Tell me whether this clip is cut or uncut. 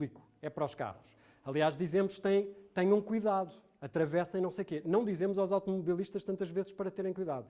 uncut